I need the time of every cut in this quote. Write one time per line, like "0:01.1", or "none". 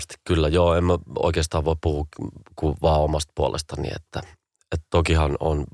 none